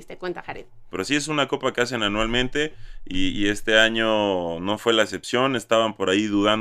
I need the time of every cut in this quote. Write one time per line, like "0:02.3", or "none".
0:00.9